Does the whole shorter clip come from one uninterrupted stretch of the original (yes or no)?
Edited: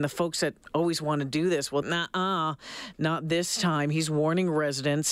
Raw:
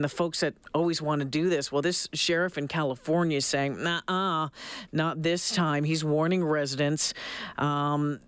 no